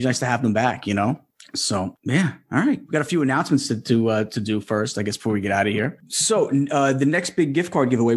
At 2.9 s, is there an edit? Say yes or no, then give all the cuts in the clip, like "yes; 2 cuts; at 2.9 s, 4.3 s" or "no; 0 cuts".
yes; 1 cut; at 2.9 s